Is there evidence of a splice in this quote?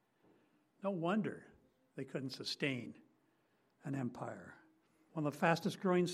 yes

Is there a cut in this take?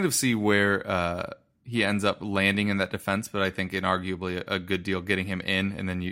no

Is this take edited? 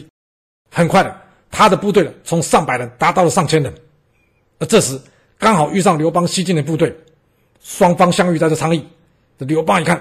no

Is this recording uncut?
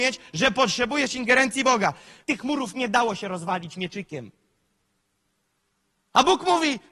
no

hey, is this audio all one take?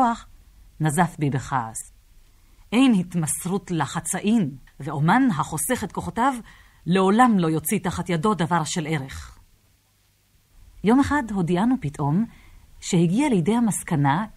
no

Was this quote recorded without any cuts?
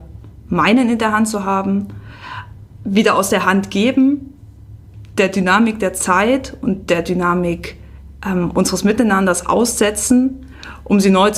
yes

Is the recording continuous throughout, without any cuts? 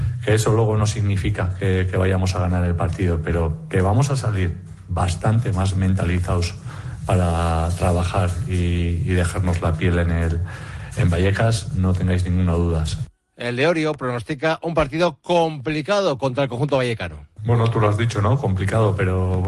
yes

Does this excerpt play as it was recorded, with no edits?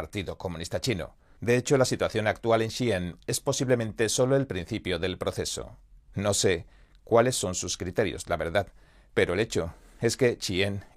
no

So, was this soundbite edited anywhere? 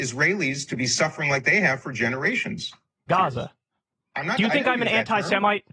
yes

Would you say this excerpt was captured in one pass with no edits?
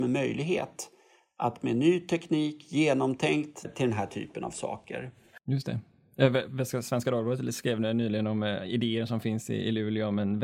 no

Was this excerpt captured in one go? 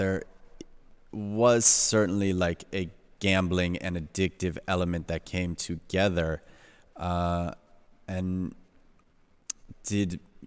yes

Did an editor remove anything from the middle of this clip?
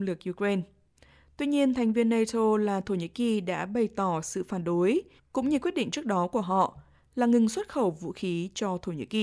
yes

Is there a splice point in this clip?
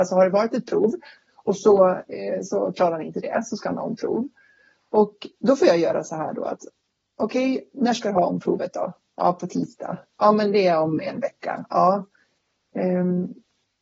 no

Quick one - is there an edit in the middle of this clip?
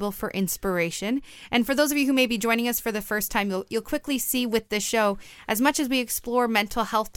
no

